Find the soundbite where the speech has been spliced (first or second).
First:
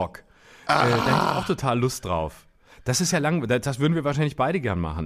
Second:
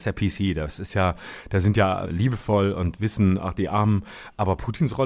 second